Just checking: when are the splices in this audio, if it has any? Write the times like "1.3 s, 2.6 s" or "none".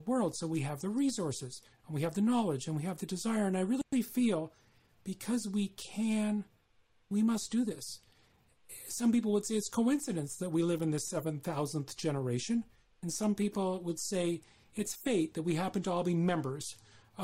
none

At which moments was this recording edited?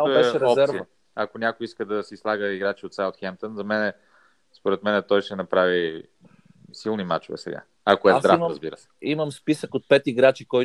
6.7 s

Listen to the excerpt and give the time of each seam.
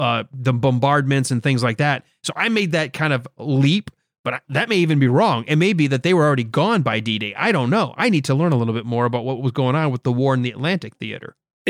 none

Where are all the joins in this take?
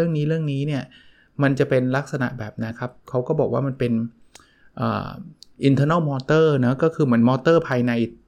2.7 s

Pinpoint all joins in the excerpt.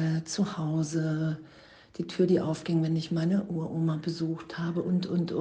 none

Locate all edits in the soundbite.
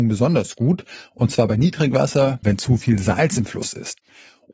2.4 s

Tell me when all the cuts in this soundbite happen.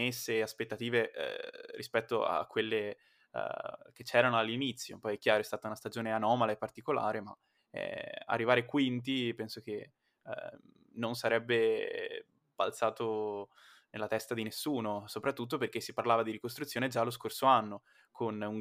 none

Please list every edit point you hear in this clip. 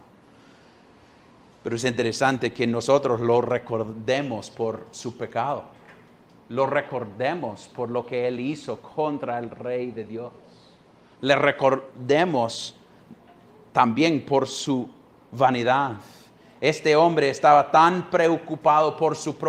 none

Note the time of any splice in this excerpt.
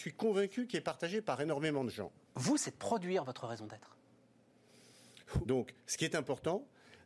2.2 s, 5.4 s

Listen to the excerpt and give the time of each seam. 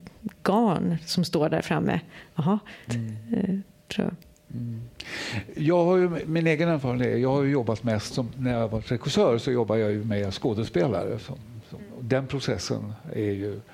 2.9 s

